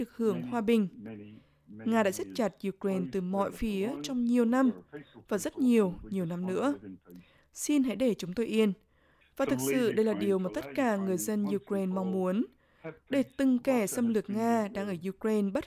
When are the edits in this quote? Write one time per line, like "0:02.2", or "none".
0:09.2

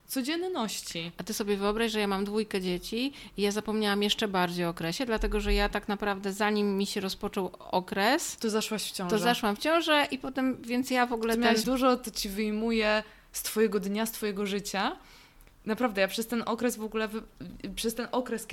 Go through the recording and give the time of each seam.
0:11.6

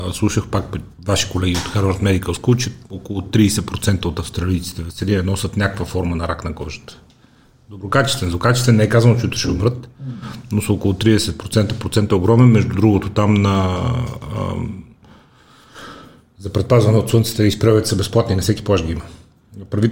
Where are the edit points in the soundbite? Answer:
none

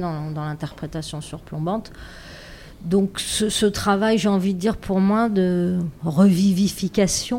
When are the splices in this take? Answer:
none

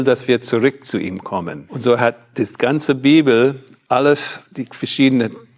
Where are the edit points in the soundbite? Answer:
0:03.9

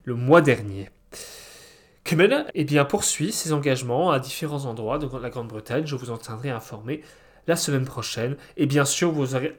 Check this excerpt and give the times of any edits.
0:02.5

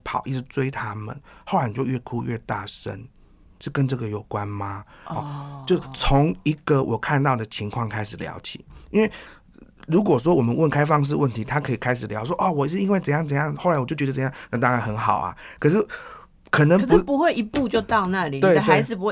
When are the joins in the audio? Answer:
none

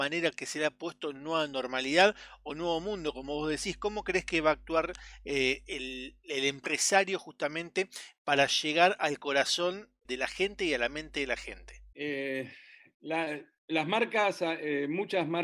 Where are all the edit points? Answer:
0:10.0
0:11.9

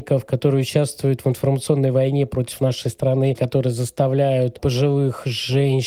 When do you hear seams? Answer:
0:03.4

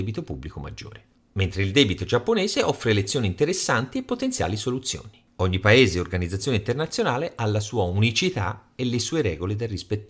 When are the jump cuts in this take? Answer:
0:01.2
0:05.3

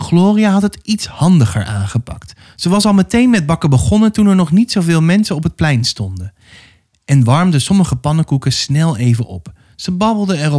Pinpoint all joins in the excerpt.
none

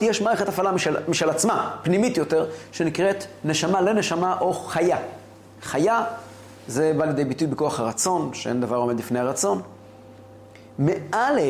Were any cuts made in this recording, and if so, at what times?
none

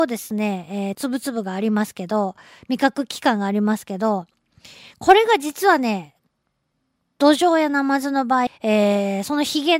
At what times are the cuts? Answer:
0:00.9
0:08.5

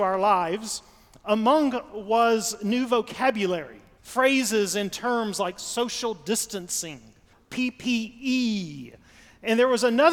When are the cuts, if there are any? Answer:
0:04.0
0:07.3

